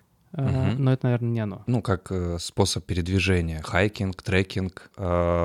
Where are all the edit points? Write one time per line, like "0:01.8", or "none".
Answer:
0:01.7

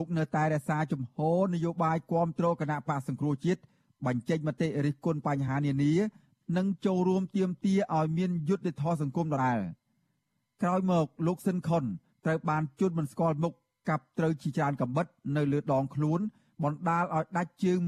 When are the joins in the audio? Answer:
0:09.4

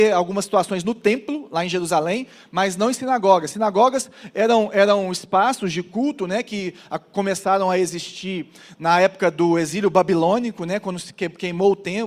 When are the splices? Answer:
none

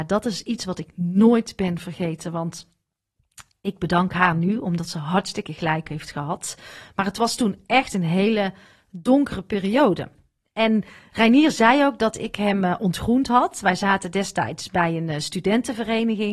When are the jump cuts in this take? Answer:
none

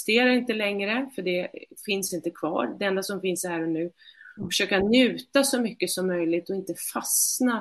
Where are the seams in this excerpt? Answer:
none

